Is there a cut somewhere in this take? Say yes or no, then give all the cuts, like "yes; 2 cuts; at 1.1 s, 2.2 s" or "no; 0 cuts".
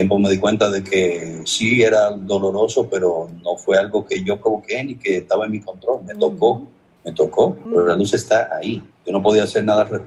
yes; 2 cuts; at 7.7 s, 8.9 s